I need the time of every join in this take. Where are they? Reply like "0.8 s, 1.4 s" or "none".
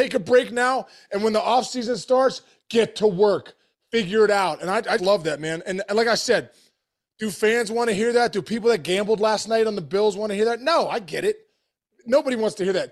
5.0 s

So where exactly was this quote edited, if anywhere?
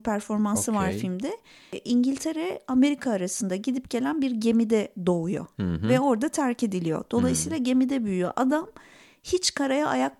none

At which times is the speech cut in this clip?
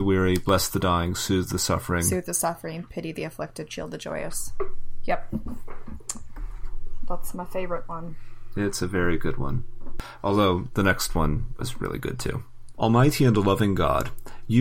11.6 s, 12.7 s

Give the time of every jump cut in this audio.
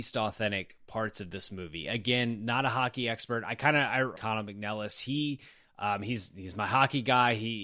4.1 s

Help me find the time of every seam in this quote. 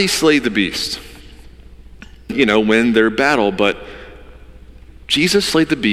2.3 s

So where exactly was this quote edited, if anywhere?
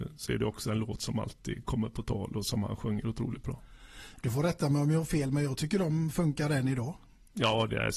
none

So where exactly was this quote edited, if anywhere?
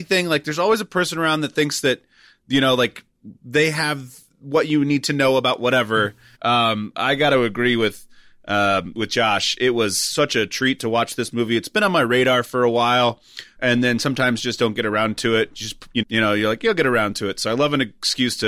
6.3 s, 13.6 s, 16.0 s

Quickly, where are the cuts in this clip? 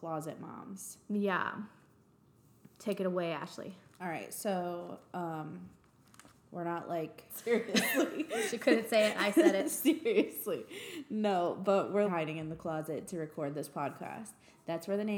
7.3 s, 12.1 s

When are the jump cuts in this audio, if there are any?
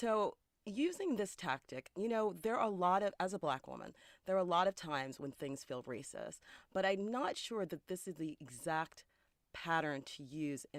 none

